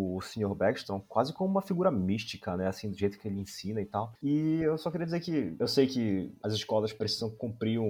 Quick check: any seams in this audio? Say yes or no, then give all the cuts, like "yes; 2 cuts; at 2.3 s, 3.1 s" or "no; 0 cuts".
no; 0 cuts